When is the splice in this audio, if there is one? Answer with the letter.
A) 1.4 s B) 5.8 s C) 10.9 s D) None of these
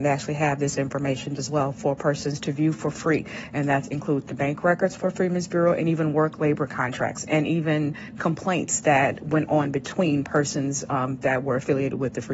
A